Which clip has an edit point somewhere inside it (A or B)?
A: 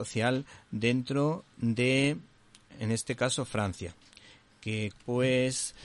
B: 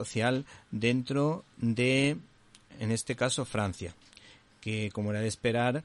A